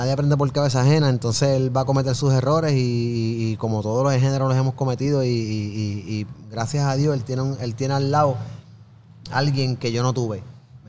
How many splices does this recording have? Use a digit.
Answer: 0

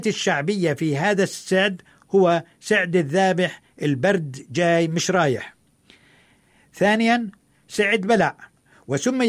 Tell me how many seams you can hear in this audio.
0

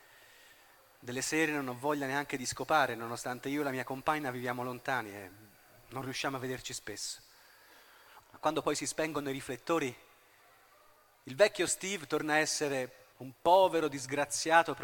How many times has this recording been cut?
2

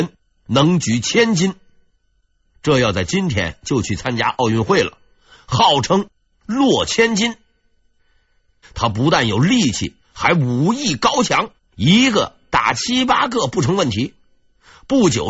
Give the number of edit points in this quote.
2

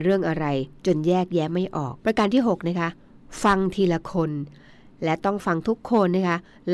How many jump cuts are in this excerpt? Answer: 1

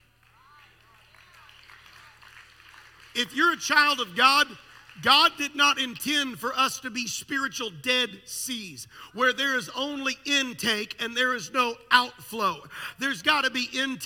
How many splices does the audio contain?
0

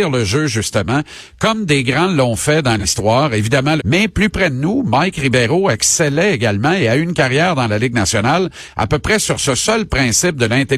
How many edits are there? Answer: 1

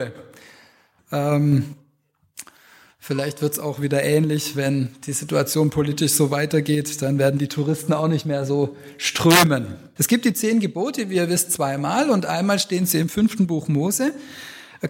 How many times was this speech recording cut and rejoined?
2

